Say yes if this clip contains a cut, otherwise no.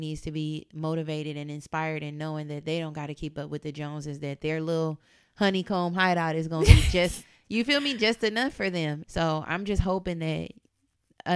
yes